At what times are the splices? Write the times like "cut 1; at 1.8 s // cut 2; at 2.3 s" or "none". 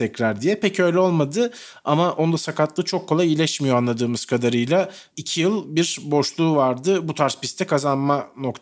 cut 1; at 5.1 s